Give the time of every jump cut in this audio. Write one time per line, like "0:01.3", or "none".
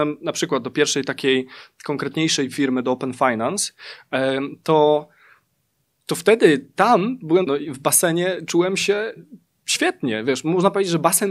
0:07.5